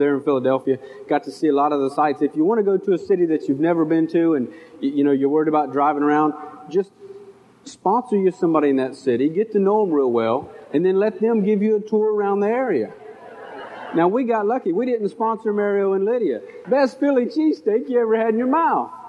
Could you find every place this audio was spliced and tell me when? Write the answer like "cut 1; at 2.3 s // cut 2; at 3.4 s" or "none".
cut 1; at 16.6 s